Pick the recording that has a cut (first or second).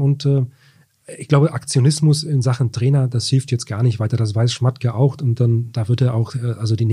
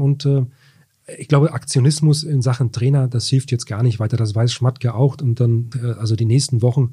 second